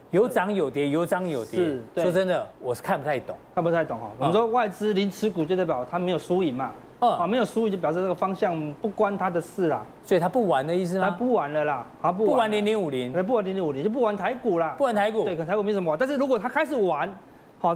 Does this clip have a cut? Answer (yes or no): no